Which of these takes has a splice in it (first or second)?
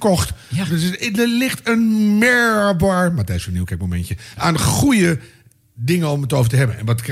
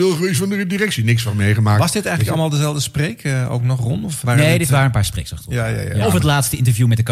second